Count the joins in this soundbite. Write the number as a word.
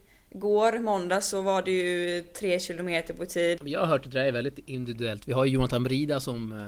one